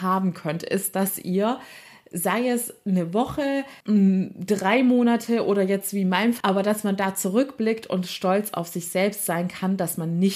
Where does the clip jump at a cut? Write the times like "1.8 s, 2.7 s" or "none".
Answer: 3.8 s, 6.4 s